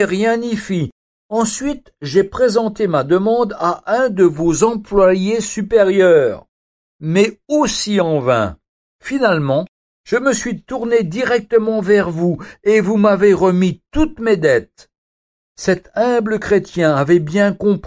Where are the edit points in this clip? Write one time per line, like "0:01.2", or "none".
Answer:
none